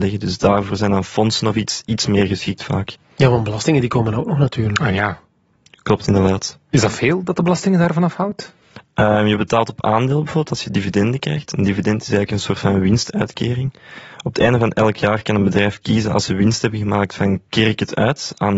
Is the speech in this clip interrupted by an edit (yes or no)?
no